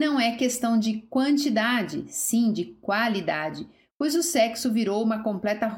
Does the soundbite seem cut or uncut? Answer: uncut